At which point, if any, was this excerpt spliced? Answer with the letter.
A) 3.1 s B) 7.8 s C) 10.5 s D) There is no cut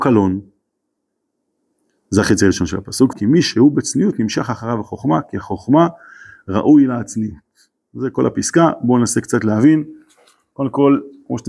A